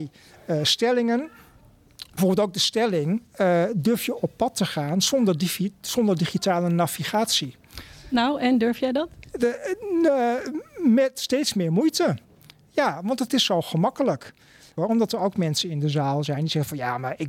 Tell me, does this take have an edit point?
yes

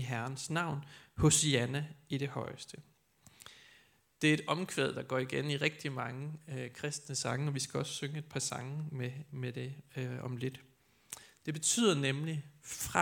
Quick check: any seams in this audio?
no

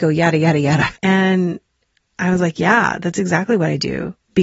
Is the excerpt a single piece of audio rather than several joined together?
no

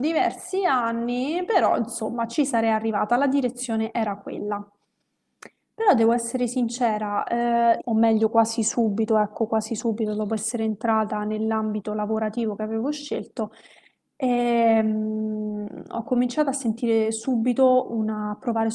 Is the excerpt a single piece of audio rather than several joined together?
no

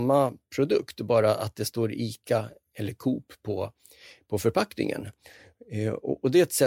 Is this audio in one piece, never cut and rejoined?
yes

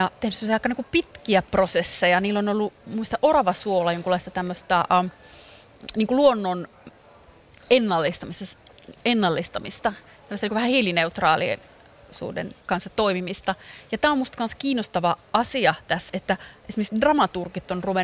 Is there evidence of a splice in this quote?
yes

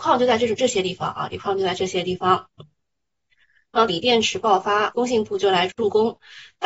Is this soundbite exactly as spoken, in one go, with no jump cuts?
no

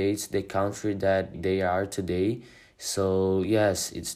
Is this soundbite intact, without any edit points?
no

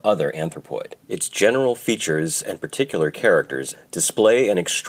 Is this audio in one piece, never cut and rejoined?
no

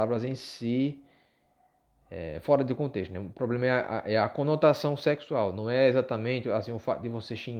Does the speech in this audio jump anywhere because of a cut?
no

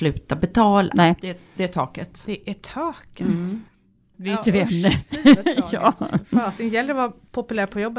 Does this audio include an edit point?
yes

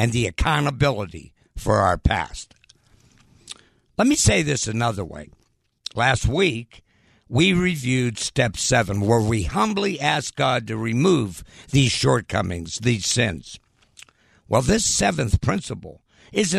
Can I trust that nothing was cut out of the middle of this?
yes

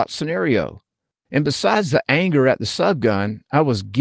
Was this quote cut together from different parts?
yes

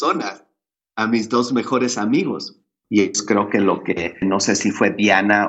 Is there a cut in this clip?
yes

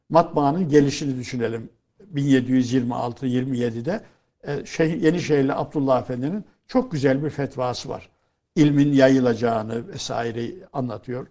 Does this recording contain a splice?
no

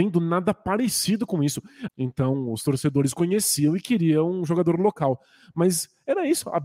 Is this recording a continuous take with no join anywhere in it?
no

